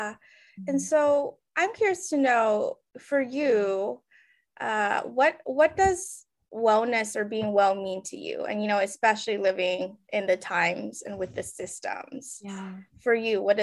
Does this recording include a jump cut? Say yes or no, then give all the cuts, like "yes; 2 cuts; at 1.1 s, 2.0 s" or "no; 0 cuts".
yes; 1 cut; at 10.0 s